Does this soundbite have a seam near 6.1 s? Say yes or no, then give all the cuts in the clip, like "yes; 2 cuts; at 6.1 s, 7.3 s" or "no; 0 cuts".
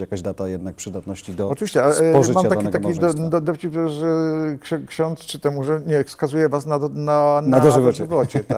yes; 1 cut; at 6.1 s